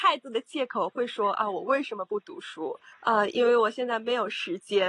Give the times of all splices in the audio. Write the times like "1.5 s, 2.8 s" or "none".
2.9 s